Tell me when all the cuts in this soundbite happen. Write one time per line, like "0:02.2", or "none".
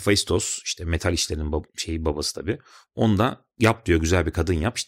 0:03.5